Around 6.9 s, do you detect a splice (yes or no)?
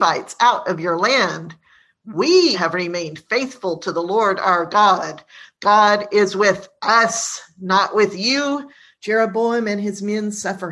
no